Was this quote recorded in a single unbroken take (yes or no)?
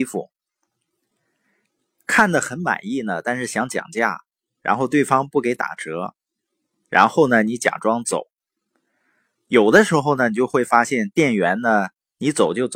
yes